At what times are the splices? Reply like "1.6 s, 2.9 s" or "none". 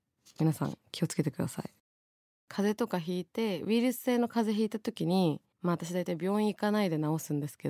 5.5 s